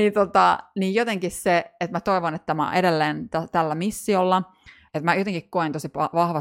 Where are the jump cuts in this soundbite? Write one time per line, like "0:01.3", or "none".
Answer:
0:04.9